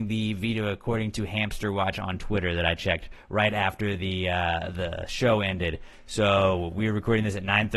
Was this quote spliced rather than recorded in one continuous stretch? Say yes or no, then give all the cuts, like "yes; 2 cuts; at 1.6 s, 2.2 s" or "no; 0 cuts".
no; 0 cuts